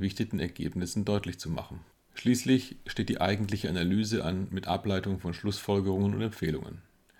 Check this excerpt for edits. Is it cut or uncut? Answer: uncut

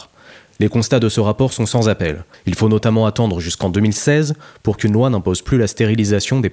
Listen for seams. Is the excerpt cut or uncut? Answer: cut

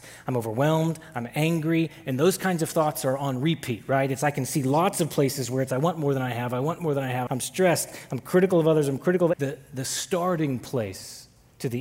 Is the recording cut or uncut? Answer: cut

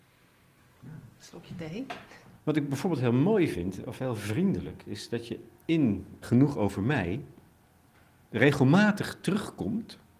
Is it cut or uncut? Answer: cut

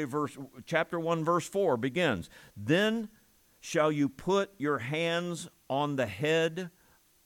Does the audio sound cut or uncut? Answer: uncut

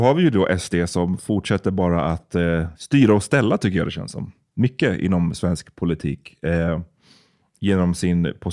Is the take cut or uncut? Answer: uncut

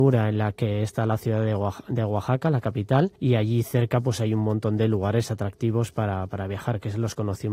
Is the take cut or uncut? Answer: cut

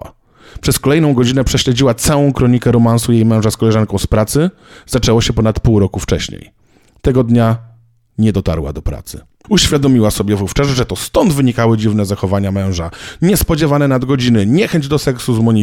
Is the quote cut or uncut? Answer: cut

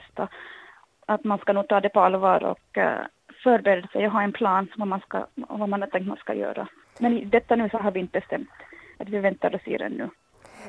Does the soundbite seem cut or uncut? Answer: cut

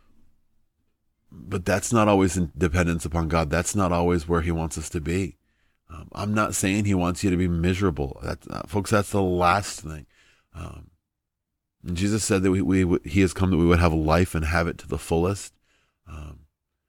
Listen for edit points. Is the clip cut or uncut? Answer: uncut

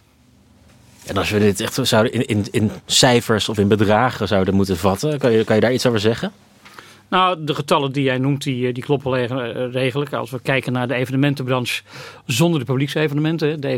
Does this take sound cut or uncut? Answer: uncut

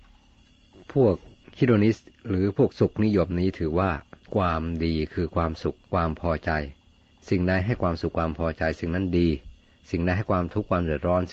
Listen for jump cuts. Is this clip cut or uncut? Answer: cut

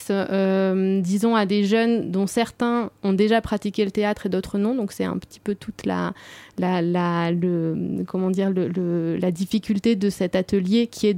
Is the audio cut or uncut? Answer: uncut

